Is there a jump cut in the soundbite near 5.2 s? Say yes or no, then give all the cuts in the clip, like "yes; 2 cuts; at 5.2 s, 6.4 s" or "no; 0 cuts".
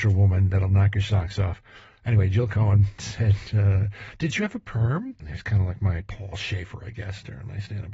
yes; 1 cut; at 5.2 s